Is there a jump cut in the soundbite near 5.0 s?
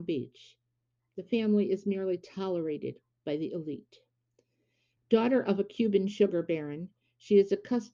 yes; 1 cut; at 5.0 s

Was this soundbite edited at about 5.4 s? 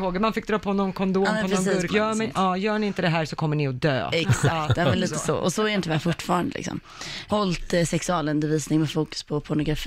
no; 2 cuts; at 1.9 s, 7.3 s

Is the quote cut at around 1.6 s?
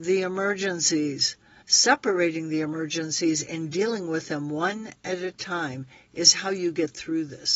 yes; 1 cut; at 1.6 s

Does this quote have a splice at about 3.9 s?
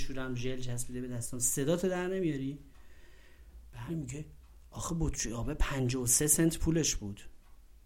yes; 1 cut; at 3.9 s

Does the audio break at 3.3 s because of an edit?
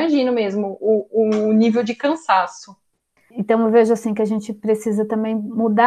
yes; 1 cut; at 3.3 s

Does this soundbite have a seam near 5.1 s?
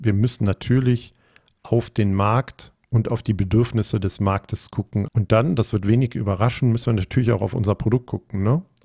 yes; 1 cut; at 5.1 s

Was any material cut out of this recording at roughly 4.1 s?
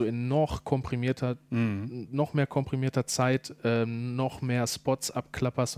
no; 1 cut; at 1.4 s

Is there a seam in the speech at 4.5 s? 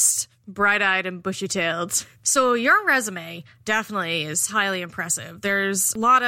yes; 2 cuts; at 2.1 s, 4.5 s

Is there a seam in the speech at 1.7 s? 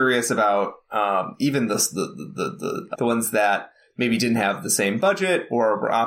no; 1 cut; at 2.9 s

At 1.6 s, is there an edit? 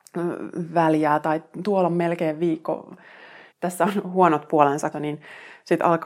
no; 2 cuts; at 3.5 s, 4.9 s

